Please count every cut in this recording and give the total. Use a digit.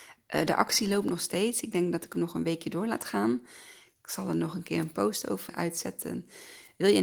1